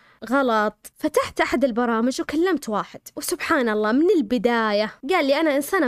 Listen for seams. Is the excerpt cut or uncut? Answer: cut